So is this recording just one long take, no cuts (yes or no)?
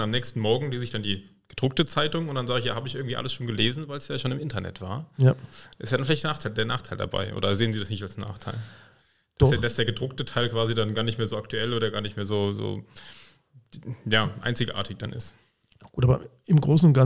yes